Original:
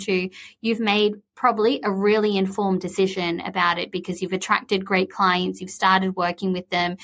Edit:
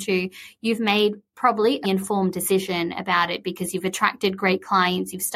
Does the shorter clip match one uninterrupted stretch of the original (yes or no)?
no